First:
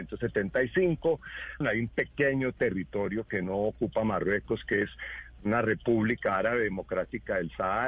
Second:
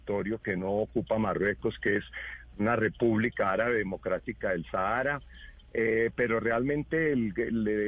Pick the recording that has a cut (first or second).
first